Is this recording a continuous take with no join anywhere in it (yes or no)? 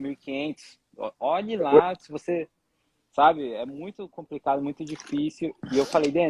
yes